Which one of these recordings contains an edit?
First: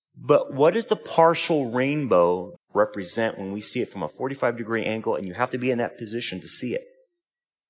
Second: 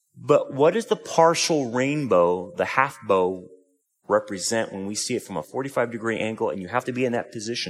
first; 1 cut; at 2.5 s

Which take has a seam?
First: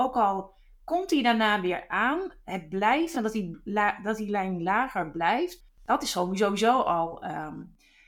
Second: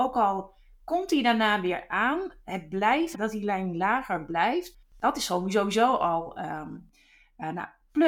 second; 1 cut; at 3.1 s

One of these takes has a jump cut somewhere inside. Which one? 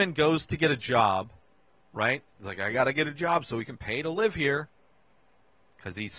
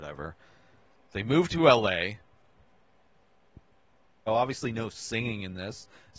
second; 1 cut; at 4.3 s

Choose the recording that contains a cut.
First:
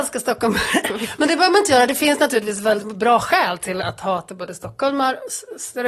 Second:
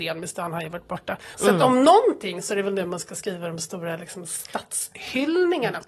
second; 1 cut; at 1.3 s

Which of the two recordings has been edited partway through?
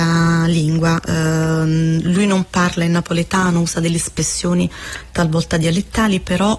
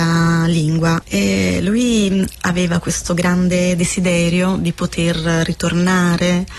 second; 1 cut; at 1.0 s

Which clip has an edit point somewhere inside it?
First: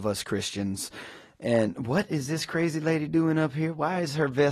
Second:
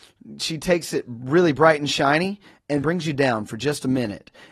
second; 1 cut; at 2.8 s

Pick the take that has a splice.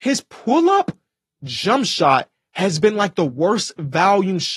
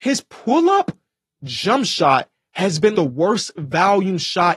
second; 1 cut; at 2.9 s

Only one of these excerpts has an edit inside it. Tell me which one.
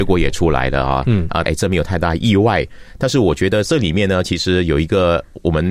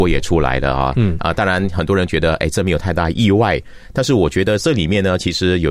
first; 1 cut; at 1.5 s

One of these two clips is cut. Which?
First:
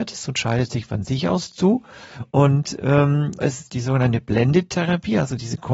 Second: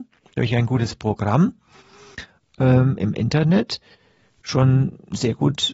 first; 1 cut; at 3.4 s

